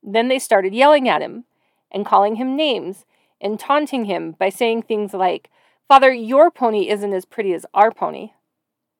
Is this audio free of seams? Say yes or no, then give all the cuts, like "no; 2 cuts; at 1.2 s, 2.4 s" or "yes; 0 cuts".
yes; 0 cuts